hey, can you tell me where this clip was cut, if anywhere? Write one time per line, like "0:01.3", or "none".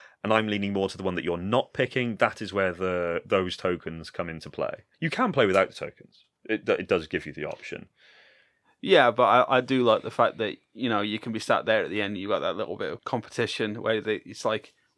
0:04.9
0:06.6